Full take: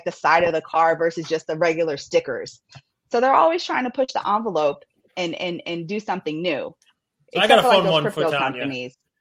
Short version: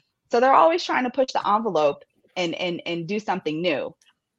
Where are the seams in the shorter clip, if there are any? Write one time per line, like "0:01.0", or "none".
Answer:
none